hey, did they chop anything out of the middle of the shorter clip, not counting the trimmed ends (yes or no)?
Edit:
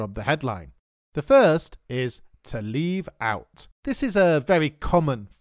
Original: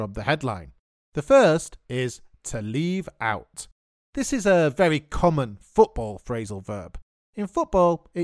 yes